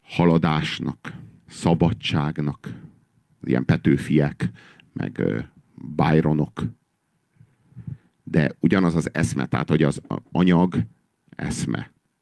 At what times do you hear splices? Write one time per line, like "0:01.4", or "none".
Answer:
none